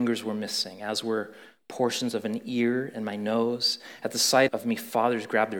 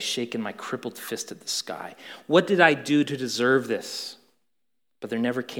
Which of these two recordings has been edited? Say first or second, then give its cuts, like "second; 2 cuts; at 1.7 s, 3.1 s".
first; 1 cut; at 4.5 s